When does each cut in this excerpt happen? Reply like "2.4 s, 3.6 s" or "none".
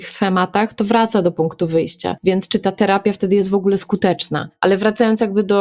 none